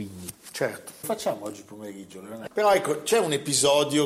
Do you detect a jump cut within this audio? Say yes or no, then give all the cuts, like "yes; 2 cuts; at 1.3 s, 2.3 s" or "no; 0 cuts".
yes; 2 cuts; at 1.0 s, 2.5 s